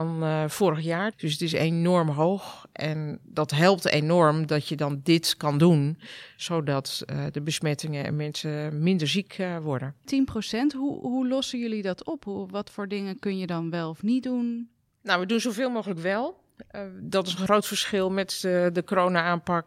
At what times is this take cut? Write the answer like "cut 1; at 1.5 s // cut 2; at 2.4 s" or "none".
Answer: cut 1; at 1.1 s